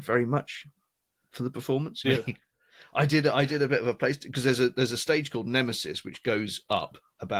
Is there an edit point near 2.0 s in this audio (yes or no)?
yes